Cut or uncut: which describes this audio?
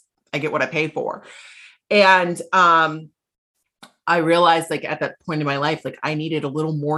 uncut